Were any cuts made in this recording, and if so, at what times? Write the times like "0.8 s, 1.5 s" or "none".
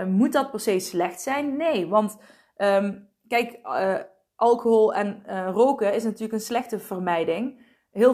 none

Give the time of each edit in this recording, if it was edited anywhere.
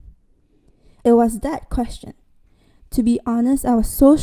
1.0 s

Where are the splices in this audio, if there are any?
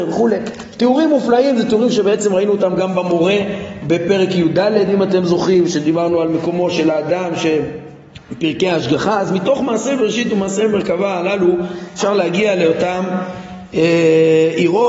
none

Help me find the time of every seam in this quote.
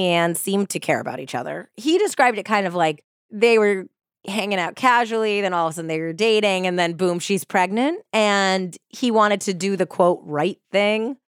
none

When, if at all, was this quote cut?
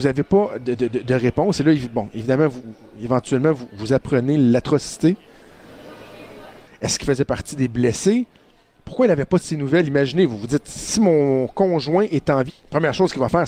6.7 s, 12.5 s

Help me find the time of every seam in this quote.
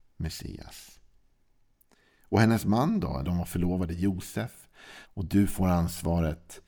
3.2 s, 5.0 s

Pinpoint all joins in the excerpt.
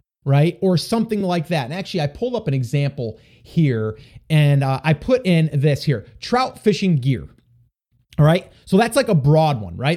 none

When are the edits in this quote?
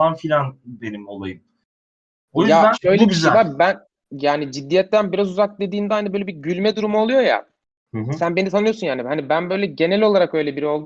2.7 s

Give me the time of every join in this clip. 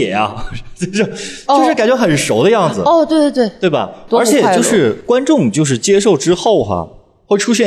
4.1 s

